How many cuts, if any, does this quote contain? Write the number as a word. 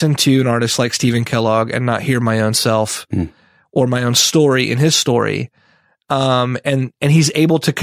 zero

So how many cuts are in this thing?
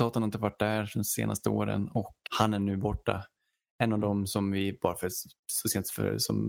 one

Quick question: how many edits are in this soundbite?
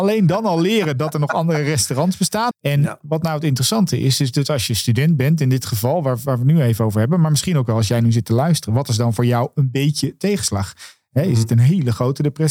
one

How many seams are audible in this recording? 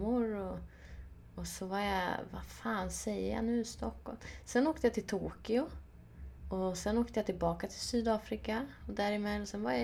one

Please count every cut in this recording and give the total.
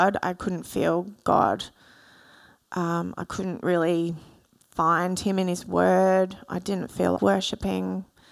one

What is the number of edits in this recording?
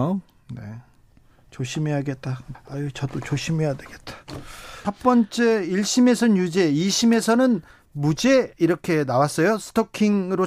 two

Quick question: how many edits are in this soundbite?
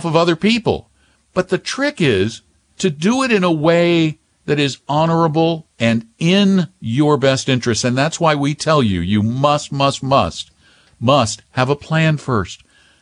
one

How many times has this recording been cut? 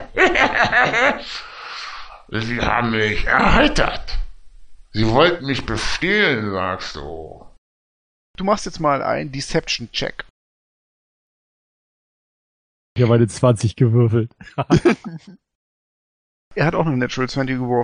one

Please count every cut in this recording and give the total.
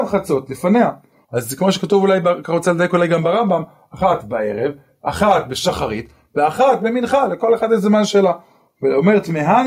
one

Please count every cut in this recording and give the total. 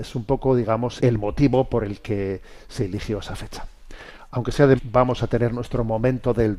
two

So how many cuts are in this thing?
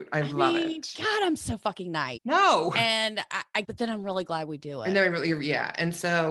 two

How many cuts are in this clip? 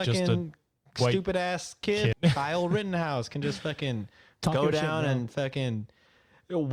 one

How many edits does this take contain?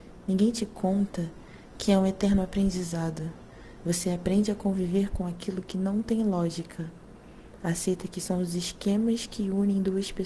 one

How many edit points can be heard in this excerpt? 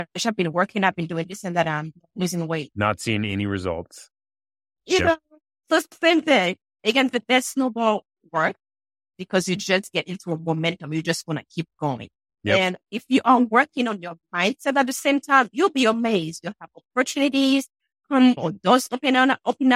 zero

